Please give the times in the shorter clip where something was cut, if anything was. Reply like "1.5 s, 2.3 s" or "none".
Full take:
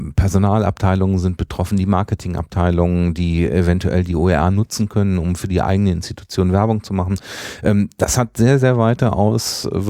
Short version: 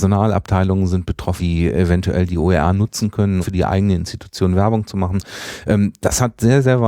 1.4 s, 3.4 s